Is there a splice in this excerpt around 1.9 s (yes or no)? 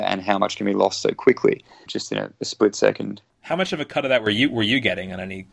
yes